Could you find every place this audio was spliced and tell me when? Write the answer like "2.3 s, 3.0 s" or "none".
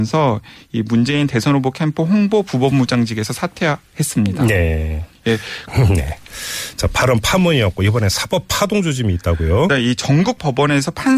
5.7 s, 9.7 s